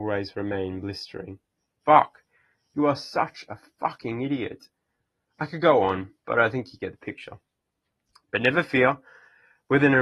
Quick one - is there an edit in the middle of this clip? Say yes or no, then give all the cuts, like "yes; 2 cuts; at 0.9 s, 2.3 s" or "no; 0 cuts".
yes; 1 cut; at 1.8 s